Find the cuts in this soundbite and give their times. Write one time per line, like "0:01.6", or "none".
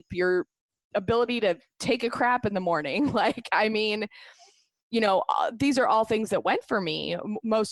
none